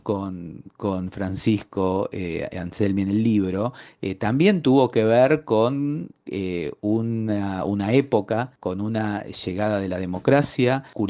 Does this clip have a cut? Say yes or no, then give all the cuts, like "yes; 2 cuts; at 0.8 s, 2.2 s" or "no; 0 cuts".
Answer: no; 0 cuts